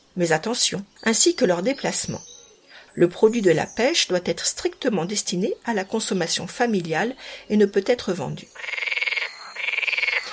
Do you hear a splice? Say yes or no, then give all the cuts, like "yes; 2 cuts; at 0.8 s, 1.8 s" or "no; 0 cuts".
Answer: yes; 2 cuts; at 1.0 s, 2.9 s